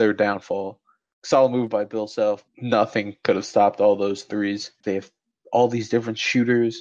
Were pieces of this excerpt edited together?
yes; 3 cuts; at 1.1 s, 2.5 s, 4.8 s

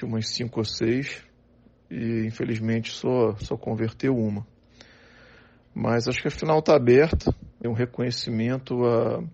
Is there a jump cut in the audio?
yes; 1 cut; at 7.6 s

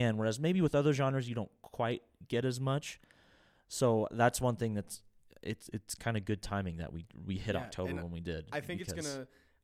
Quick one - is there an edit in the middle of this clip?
no; 0 cuts

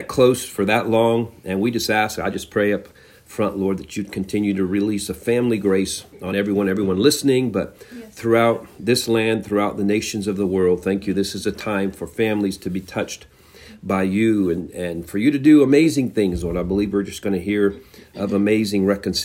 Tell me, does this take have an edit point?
no; 0 cuts

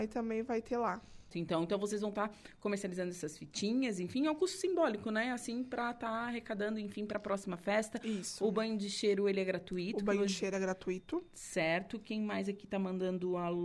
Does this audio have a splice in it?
yes; 1 cut; at 1.3 s

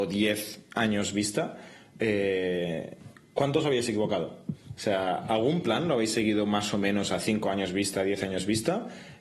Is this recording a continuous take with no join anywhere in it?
yes; 0 cuts

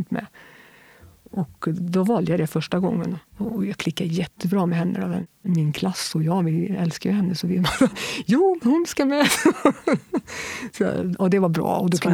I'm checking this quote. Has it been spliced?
no; 0 cuts

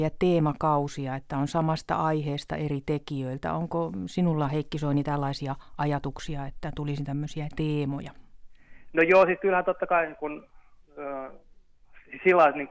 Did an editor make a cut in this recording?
no; 0 cuts

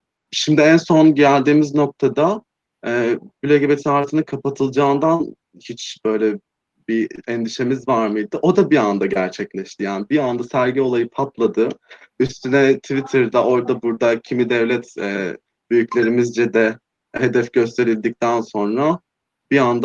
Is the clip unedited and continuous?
yes; 0 cuts

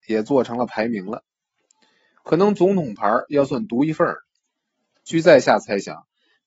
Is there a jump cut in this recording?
no; 0 cuts

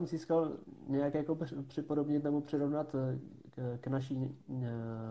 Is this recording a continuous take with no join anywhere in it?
yes; 0 cuts

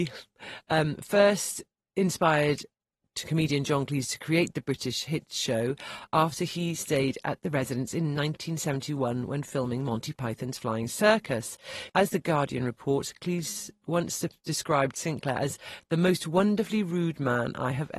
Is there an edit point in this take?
yes; 1 cut; at 11.9 s

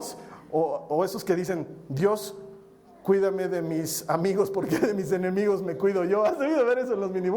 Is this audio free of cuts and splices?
yes; 0 cuts

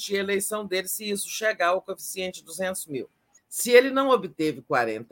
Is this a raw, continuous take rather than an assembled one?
no; 1 cut; at 3.4 s

